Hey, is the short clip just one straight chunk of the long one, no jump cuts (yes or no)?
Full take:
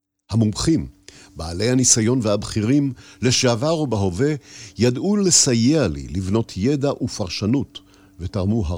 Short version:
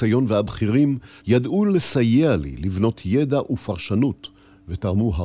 no